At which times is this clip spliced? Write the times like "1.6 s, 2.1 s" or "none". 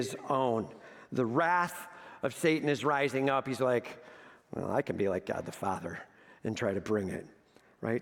none